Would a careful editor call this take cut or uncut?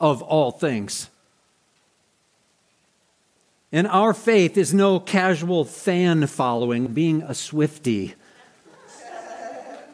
cut